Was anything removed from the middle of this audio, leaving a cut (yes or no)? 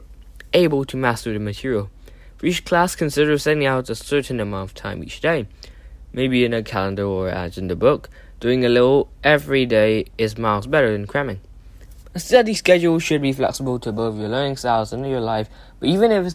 no